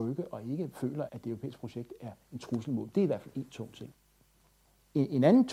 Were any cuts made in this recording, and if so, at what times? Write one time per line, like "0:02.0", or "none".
0:01.1